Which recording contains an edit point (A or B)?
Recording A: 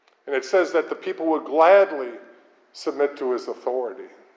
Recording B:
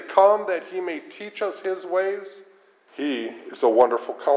B